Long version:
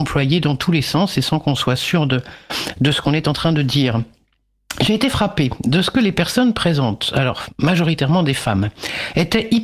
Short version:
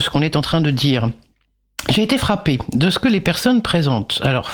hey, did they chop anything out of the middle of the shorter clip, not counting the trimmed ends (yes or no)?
no